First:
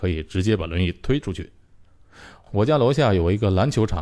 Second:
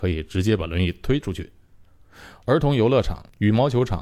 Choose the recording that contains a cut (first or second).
second